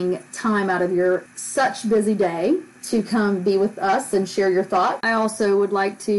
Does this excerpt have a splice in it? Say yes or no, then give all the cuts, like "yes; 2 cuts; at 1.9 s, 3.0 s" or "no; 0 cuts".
yes; 1 cut; at 5.0 s